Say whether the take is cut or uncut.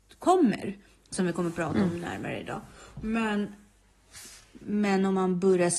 uncut